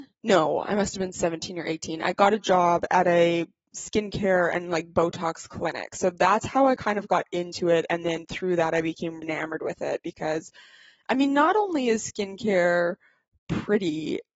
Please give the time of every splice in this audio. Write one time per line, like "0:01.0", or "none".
0:09.2